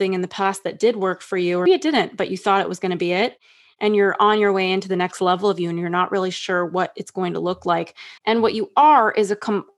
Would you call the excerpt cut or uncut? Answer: cut